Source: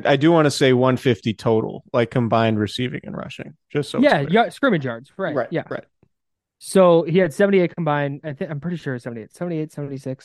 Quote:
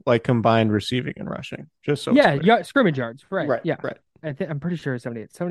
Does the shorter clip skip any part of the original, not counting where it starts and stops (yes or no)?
yes